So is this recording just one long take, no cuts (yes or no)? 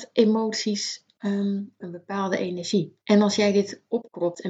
no